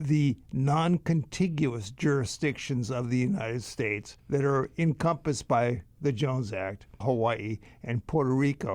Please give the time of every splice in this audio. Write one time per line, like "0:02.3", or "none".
0:04.2
0:07.0